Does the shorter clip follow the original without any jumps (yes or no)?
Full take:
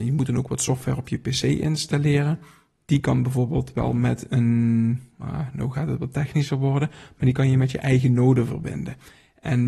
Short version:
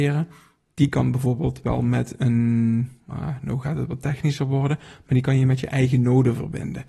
yes